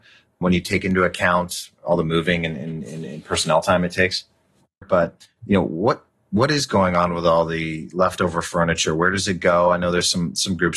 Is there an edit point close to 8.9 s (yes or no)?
no